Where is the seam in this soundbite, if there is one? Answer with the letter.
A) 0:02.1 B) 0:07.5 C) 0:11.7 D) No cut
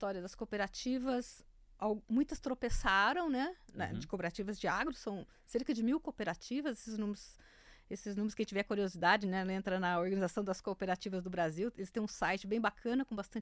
D